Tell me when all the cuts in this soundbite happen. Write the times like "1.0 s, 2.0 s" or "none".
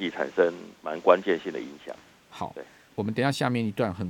2.9 s